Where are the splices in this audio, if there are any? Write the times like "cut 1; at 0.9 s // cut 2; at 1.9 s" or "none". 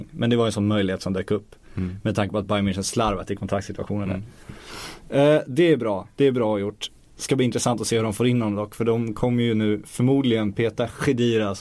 none